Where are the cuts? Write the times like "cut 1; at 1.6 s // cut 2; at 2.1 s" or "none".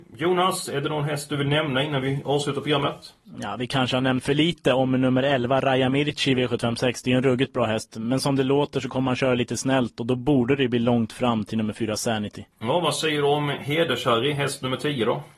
cut 1; at 4.2 s // cut 2; at 12.5 s